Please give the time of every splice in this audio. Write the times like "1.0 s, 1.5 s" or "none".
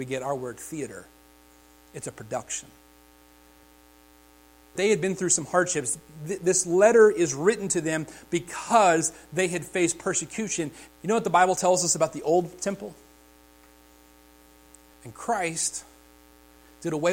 4.8 s, 10.9 s, 14.9 s